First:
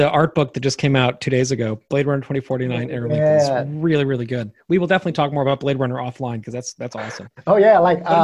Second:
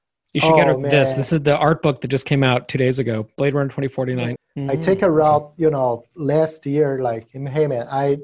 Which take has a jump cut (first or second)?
second